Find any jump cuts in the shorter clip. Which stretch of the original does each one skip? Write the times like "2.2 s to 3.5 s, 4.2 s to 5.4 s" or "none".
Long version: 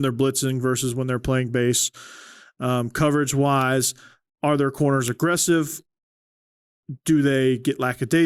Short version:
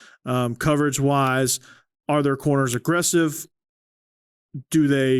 none